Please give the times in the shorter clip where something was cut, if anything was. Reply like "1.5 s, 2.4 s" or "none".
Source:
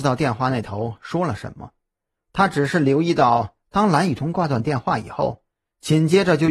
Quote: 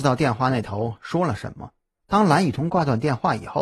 2.0 s